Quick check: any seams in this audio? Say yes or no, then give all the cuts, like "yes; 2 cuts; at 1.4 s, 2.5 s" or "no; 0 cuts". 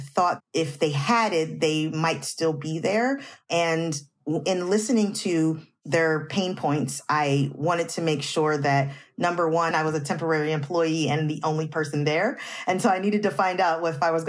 yes; 1 cut; at 9.7 s